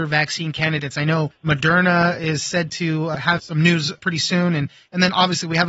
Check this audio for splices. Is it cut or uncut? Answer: uncut